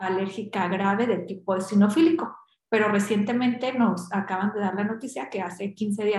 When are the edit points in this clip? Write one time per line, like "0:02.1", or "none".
none